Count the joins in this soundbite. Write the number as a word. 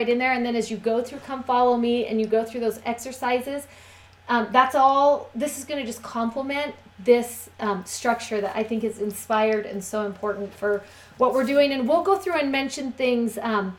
zero